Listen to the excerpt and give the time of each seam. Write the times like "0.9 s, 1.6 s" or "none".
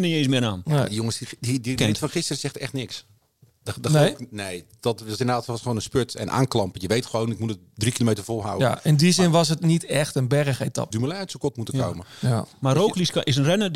1.8 s, 4.8 s, 10.9 s

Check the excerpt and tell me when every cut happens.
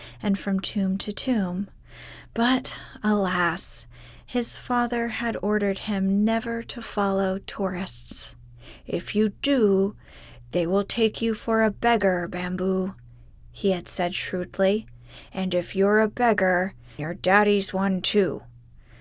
17.0 s

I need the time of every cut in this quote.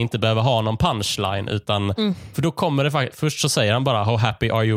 2.3 s

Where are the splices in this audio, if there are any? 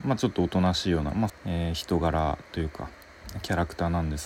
1.3 s

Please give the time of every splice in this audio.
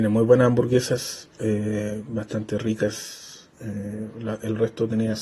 3.5 s

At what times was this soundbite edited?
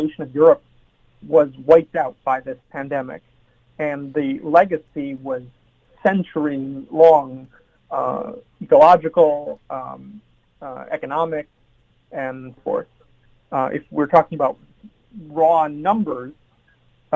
2.6 s, 12.6 s

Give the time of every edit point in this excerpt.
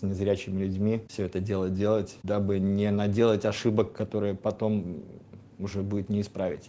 none

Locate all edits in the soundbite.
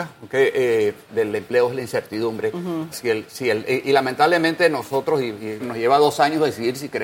1.1 s, 2.9 s, 5.6 s

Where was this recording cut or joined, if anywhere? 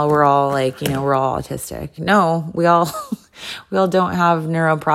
2.0 s

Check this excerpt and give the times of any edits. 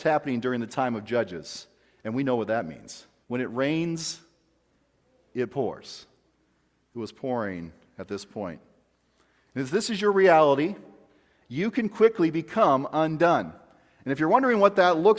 3.2 s

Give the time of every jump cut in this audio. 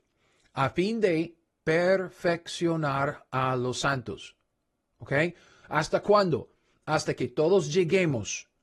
5.6 s

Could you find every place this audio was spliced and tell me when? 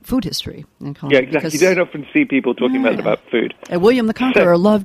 3.0 s

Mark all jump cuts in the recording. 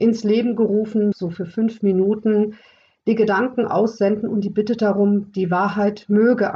1.1 s

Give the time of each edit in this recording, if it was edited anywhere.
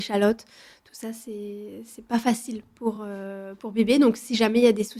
none

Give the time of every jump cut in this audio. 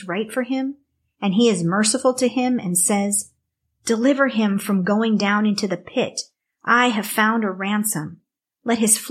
none

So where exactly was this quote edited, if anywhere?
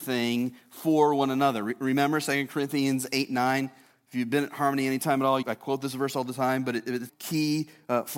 5.4 s, 7.1 s

